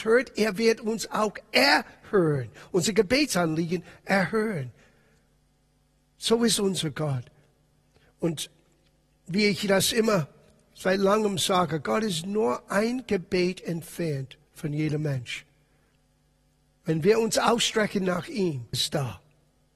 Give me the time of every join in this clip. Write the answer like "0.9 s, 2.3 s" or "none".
18.7 s

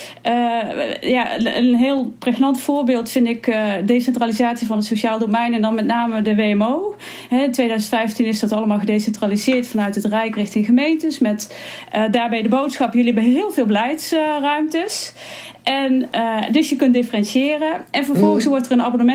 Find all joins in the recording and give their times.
none

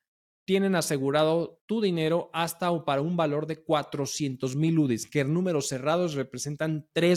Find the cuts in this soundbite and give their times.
none

